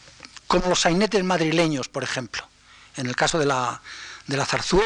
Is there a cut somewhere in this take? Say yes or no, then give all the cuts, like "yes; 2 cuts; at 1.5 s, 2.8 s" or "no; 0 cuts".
no; 0 cuts